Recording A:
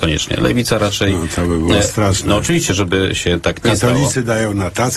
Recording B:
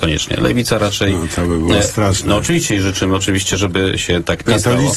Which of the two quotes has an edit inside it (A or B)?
A